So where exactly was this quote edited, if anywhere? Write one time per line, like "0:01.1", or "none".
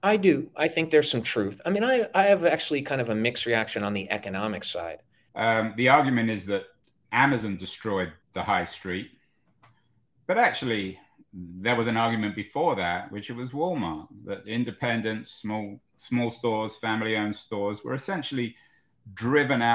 0:05.3
0:08.2